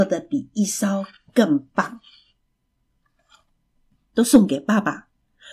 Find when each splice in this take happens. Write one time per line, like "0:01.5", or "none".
0:04.0